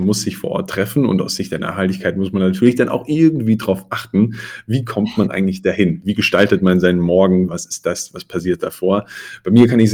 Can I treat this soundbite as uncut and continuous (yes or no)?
no